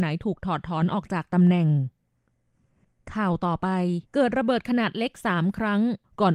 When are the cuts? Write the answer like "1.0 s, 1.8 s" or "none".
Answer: 4.1 s